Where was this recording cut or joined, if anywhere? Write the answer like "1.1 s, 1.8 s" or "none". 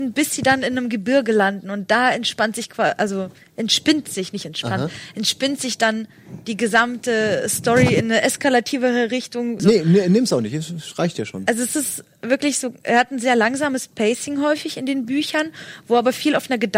9.6 s